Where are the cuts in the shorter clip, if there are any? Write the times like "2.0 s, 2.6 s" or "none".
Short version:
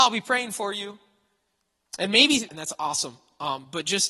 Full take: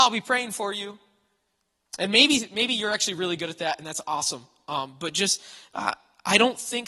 2.5 s